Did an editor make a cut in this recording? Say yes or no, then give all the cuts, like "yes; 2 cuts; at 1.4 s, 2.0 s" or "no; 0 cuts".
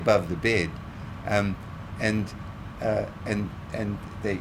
no; 0 cuts